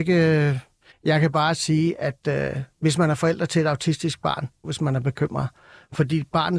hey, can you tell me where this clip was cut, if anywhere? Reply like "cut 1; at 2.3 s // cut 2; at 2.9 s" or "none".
cut 1; at 0.9 s // cut 2; at 4.6 s

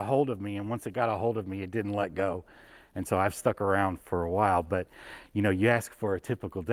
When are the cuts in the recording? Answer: cut 1; at 4.0 s

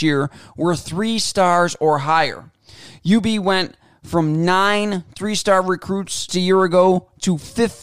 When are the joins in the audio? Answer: cut 1; at 6.3 s

